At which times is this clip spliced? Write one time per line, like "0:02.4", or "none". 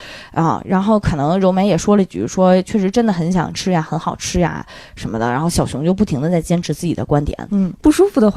0:07.5